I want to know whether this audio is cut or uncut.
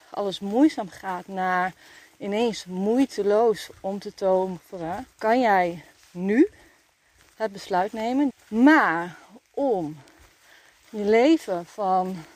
cut